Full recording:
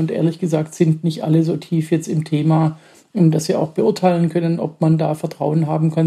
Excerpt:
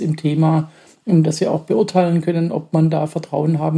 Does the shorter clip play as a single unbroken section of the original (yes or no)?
yes